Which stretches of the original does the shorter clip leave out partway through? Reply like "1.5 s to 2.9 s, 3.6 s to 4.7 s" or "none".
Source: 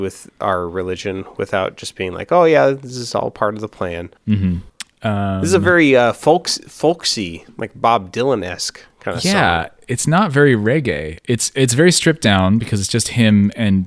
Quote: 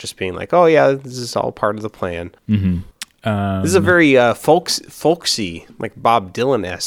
none